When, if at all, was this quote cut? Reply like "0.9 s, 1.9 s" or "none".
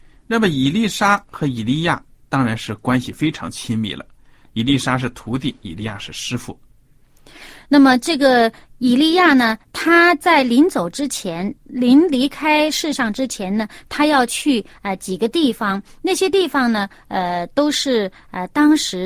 none